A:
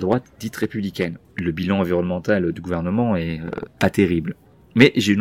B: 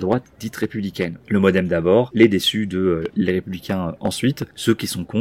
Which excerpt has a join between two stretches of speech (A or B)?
A